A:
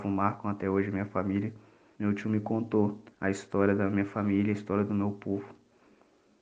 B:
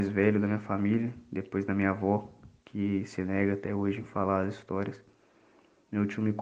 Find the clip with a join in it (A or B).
A